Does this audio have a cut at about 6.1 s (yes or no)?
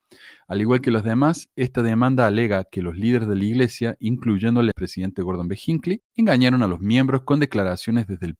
yes